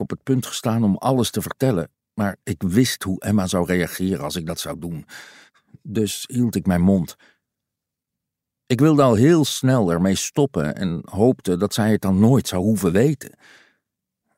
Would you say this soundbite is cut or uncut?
uncut